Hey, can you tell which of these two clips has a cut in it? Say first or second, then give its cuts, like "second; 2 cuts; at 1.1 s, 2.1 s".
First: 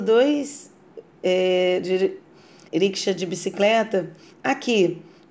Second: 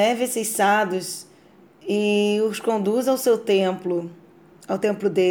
first; 2 cuts; at 2.7 s, 4.3 s